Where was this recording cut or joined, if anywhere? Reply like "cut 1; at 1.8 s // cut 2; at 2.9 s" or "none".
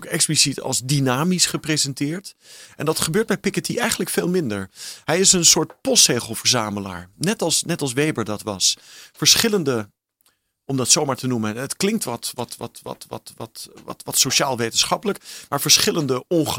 none